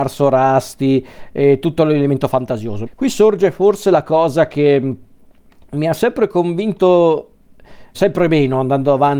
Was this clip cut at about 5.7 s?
no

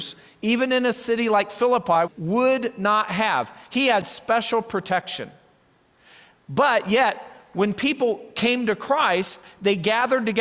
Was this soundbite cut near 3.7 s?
no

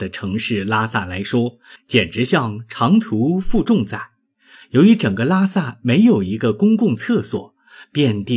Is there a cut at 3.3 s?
no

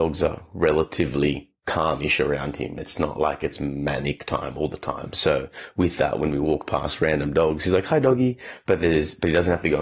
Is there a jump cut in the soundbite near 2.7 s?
no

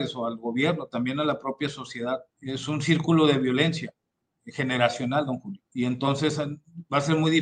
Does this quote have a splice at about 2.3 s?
yes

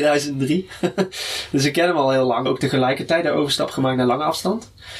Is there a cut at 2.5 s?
yes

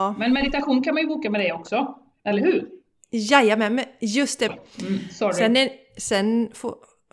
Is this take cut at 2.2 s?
no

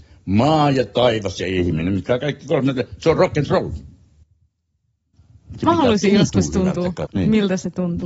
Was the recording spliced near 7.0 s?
yes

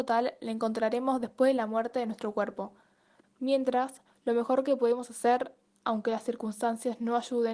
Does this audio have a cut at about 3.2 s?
yes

